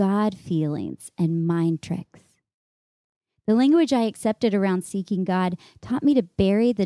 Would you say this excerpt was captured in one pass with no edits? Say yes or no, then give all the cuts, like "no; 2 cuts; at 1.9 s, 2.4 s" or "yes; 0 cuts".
yes; 0 cuts